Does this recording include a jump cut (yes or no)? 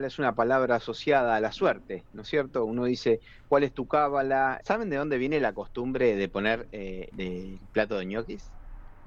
yes